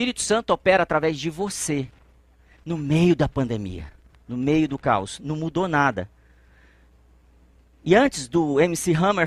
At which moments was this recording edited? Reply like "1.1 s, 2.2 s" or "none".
none